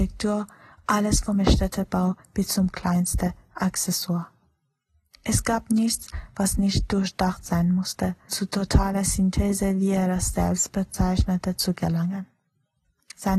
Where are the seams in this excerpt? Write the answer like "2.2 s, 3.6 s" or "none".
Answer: 8.3 s